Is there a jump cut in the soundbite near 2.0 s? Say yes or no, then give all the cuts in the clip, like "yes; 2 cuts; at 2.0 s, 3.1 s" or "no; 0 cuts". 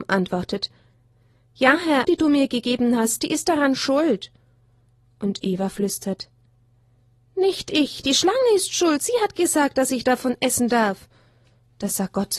yes; 1 cut; at 2.0 s